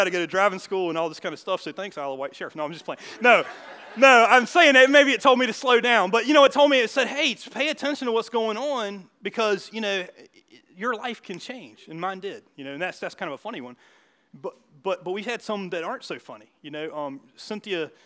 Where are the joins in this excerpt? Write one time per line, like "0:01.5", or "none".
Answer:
none